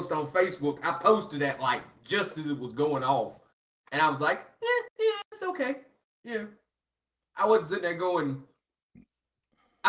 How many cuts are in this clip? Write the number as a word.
zero